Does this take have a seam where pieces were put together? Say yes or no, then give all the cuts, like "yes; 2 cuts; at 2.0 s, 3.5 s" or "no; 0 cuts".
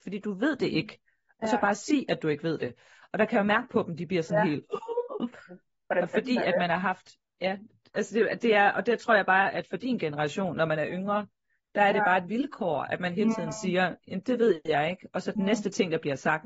no; 0 cuts